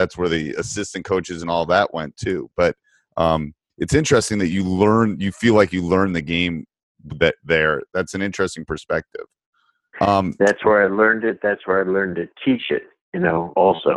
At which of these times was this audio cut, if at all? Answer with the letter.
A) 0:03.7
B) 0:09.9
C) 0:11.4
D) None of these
B